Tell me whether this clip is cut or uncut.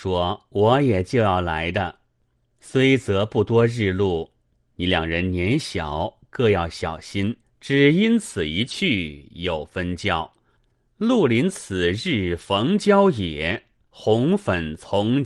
cut